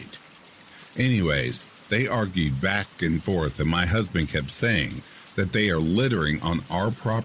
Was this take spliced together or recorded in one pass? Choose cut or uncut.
uncut